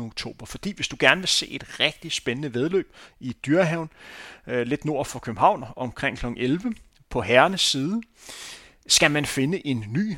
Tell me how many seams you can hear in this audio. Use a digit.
1